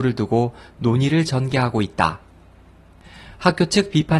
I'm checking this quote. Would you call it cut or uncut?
uncut